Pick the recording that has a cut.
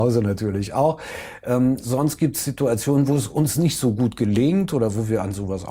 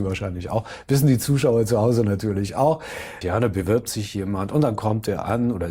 second; 1 cut; at 3.2 s

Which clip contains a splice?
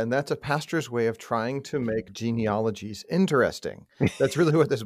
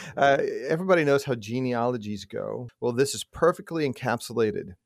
second; 1 cut; at 2.7 s

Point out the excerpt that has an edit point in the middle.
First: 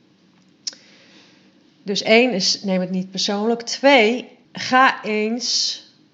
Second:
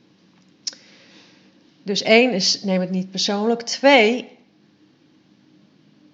first; 1 cut; at 4.5 s

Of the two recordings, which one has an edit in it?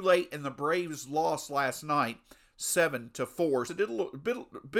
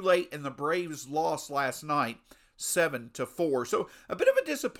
first; 1 cut; at 3.7 s

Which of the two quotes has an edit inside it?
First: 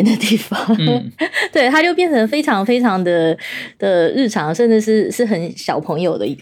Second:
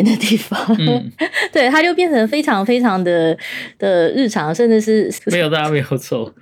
second; 1 cut; at 5.2 s

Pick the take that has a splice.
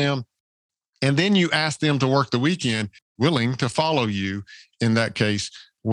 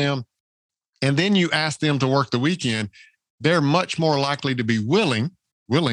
first; 1 cut; at 3.0 s

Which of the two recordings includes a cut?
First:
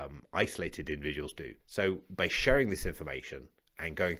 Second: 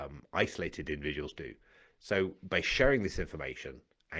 first; 1 cut; at 1.6 s

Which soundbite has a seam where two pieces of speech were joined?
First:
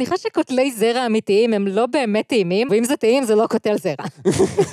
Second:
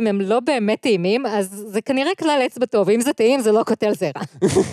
first; 1 cut; at 2.7 s

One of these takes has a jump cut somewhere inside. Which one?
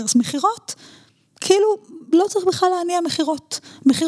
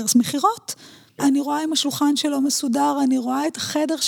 second; 1 cut; at 1.2 s

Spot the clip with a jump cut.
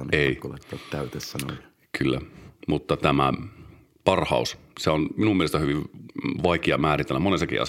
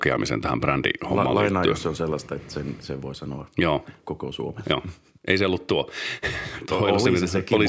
second; 1 cut; at 5.2 s

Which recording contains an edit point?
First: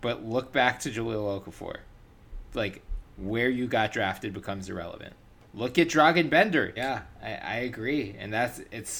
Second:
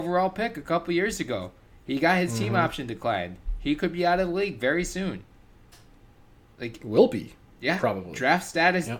first; 2 cuts; at 3.0 s, 6.8 s

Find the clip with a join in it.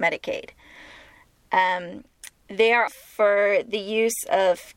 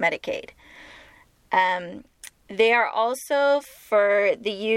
first; 1 cut; at 2.9 s

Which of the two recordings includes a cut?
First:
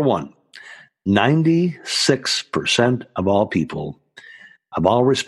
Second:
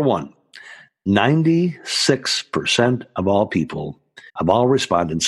second; 1 cut; at 4.3 s

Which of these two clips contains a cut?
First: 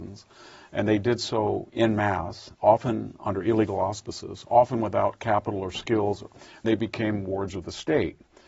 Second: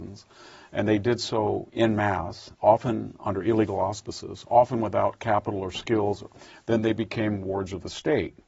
first; 1 cut; at 6.6 s

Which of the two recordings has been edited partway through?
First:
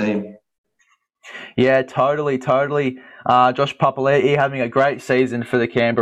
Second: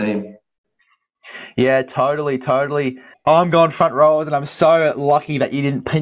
second; 1 cut; at 3.1 s

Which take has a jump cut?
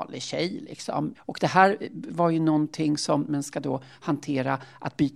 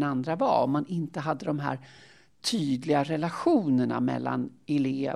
first; 2 cuts; at 1.1 s, 3.3 s

